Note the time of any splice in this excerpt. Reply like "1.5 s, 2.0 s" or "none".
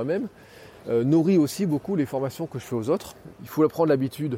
3.3 s